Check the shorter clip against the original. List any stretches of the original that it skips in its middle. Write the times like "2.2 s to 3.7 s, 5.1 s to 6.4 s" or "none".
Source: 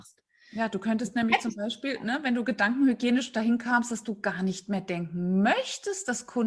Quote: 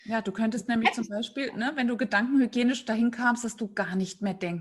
none